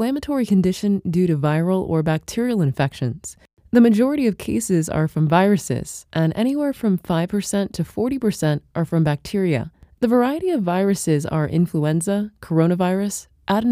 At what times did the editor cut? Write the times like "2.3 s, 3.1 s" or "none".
none